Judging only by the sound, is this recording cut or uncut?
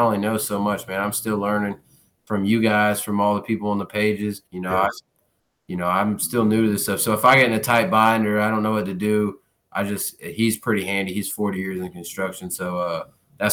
cut